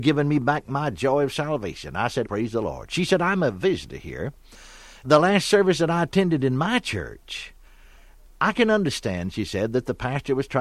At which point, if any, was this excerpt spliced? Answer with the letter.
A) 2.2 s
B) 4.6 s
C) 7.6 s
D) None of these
A